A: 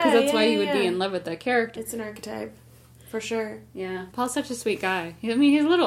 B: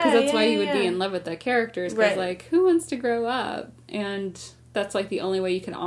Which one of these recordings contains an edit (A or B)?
A